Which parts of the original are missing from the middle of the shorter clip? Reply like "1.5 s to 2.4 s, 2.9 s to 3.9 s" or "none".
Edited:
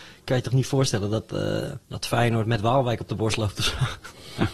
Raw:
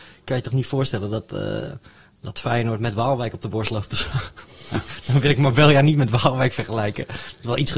1.8 s to 2.1 s